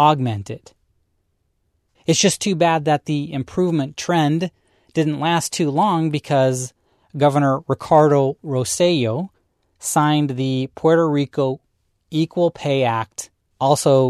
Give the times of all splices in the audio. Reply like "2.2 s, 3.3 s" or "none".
1.9 s